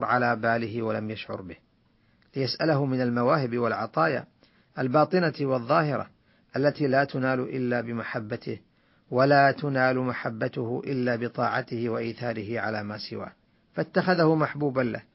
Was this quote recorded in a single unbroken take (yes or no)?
no